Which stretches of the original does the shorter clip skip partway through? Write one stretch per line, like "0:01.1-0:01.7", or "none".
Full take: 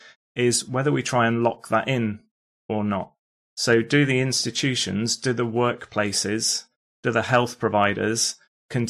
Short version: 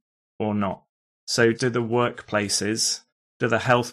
0:03.8-0:05.2